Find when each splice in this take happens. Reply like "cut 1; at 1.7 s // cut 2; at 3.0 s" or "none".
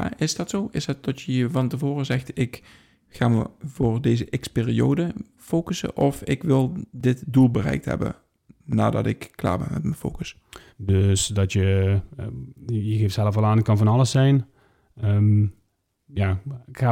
cut 1; at 10.7 s

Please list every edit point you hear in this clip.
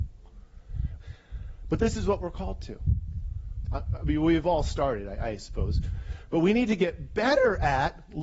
cut 1; at 1.0 s // cut 2; at 3.7 s

